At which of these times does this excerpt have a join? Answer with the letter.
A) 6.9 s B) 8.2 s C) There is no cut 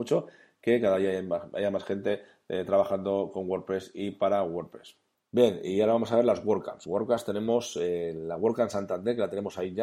C